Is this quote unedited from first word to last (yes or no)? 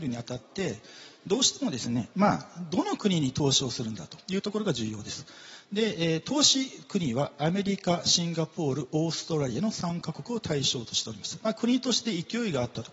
yes